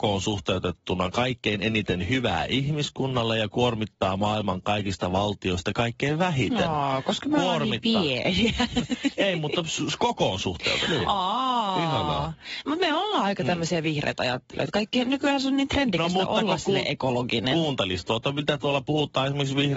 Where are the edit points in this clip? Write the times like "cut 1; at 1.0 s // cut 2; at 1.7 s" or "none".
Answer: none